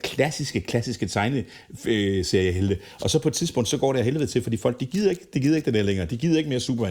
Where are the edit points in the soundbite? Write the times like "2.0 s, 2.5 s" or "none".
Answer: none